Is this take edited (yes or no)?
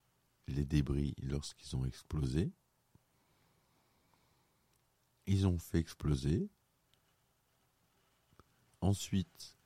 no